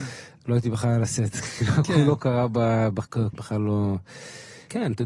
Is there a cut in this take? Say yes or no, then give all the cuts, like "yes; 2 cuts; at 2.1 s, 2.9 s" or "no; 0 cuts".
yes; 1 cut; at 3.3 s